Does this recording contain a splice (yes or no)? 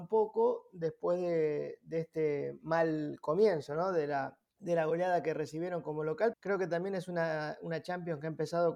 yes